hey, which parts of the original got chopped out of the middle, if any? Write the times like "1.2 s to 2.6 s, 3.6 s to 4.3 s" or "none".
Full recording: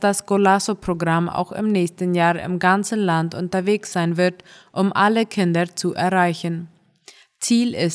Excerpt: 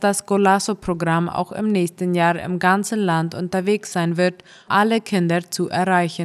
4.7 s to 4.9 s